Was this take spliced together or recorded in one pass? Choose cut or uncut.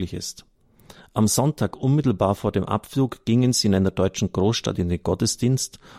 uncut